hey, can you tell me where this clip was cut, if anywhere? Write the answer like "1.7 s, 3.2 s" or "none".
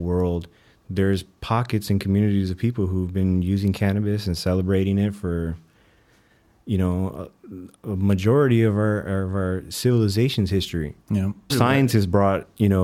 11.5 s

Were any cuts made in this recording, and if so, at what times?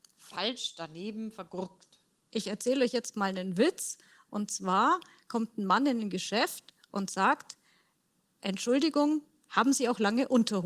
2.2 s

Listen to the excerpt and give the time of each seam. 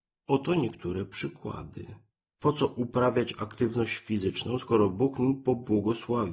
2.3 s

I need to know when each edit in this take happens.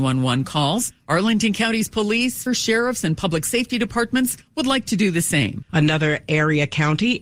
2.5 s, 5.7 s

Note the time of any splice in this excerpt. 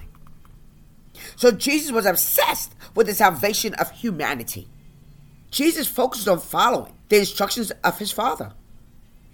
5.5 s, 7.0 s

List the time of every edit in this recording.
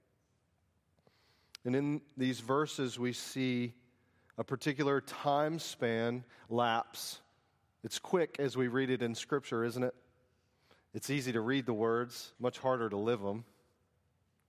12.4 s

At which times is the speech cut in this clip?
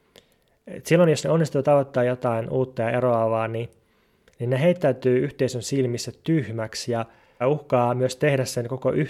7.4 s

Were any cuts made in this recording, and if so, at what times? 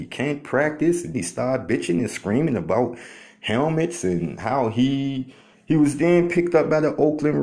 1.1 s, 5.5 s

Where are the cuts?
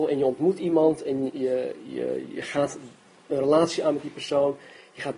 none

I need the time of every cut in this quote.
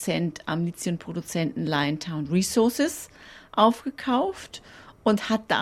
none

